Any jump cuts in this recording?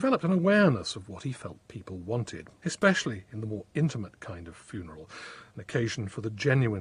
yes; 1 cut; at 2.6 s

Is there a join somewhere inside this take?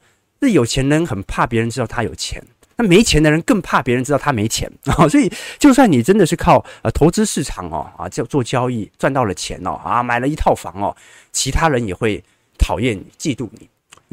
no; 0 cuts

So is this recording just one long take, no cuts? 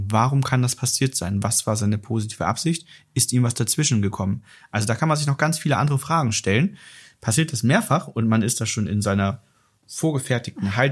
yes; 0 cuts

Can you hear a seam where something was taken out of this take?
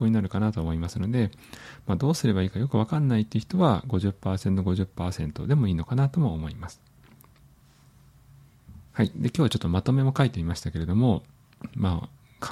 yes; 1 cut; at 8.9 s

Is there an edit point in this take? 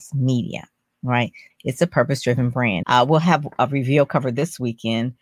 yes; 2 cuts; at 1.5 s, 2.8 s

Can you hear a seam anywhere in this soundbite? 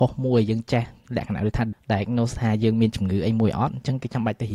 yes; 1 cut; at 1.7 s

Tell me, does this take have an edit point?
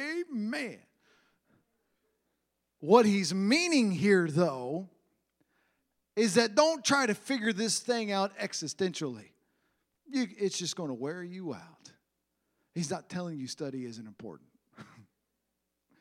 no; 0 cuts

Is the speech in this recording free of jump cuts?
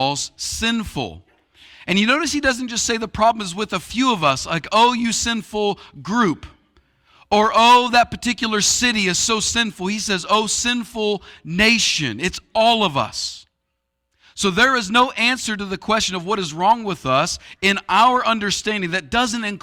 yes; 0 cuts

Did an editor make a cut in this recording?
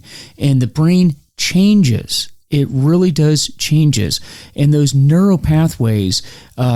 no; 0 cuts

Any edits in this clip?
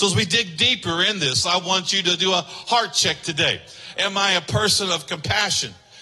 yes; 1 cut; at 3.9 s

